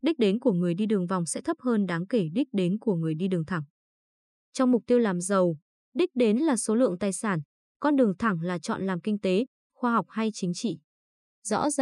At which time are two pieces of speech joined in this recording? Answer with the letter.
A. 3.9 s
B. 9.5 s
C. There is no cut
B